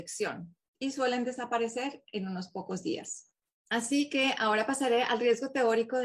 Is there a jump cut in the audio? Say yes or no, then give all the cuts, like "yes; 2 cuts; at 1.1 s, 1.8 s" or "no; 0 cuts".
no; 0 cuts